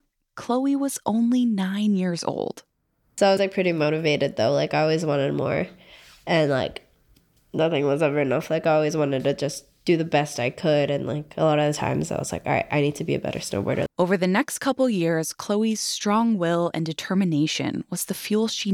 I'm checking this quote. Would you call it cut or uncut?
cut